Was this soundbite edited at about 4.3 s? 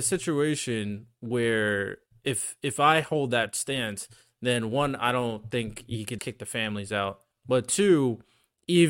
no; 1 cut; at 6.2 s

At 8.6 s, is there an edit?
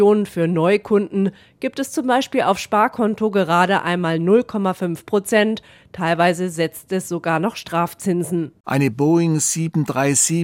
yes; 1 cut; at 8.6 s

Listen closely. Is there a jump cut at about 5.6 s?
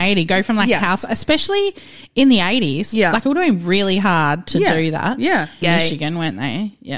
yes; 1 cut; at 5.6 s

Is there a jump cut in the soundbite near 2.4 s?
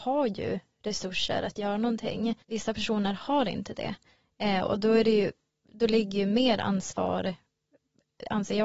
yes; 1 cut; at 2.4 s

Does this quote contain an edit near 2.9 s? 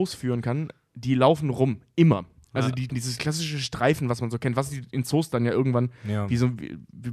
yes; 1 cut; at 2.9 s

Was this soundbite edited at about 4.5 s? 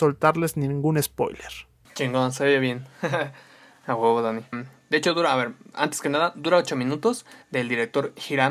yes; 2 cuts; at 4.5 s, 7.4 s

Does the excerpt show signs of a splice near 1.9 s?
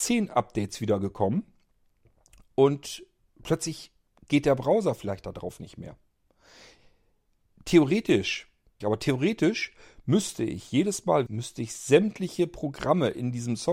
no; 2 cuts; at 8.8 s, 11.3 s

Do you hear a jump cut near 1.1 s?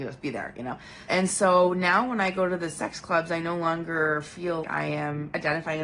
yes; 2 cuts; at 1.1 s, 4.6 s

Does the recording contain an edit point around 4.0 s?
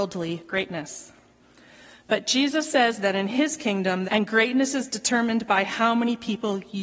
yes; 1 cut; at 4.0 s

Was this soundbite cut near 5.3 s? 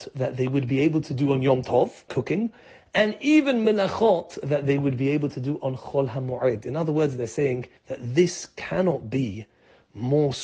no; 2 cuts; at 2.1 s, 7.8 s

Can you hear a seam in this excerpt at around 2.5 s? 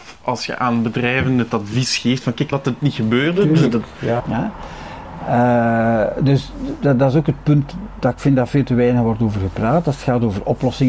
yes; 2 cuts; at 2.5 s, 4.2 s

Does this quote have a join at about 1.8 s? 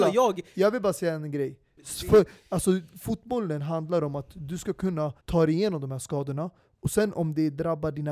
yes; 2 cuts; at 1.8 s, 5.2 s

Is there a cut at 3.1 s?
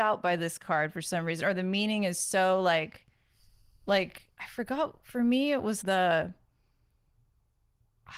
no; 1 cut; at 5.8 s

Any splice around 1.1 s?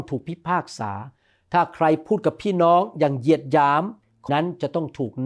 no; 1 cut; at 4.3 s

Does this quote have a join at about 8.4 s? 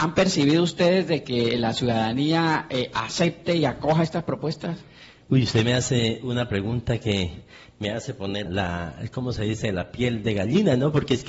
yes; 1 cut; at 8.4 s

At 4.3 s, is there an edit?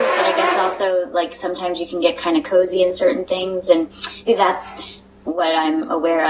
yes; 1 cut; at 4.3 s

